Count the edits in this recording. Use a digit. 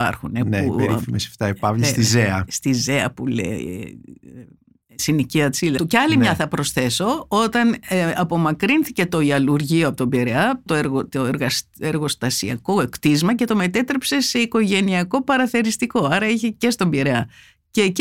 2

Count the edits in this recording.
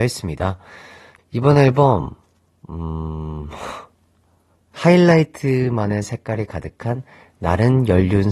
1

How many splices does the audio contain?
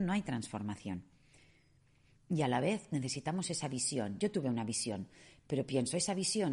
0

